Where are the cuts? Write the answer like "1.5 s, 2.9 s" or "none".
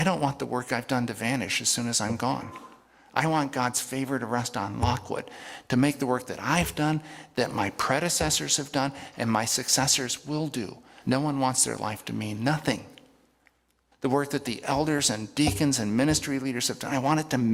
11.0 s, 13.9 s